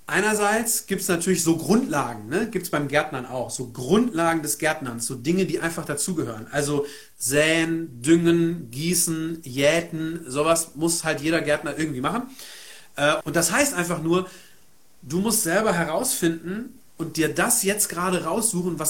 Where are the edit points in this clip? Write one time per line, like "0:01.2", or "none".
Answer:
0:13.2